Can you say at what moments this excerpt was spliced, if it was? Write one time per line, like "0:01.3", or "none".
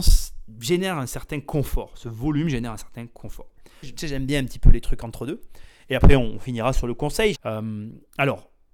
0:03.8
0:07.3